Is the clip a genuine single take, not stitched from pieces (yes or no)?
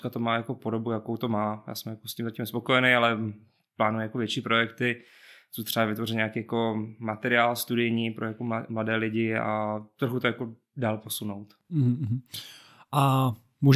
yes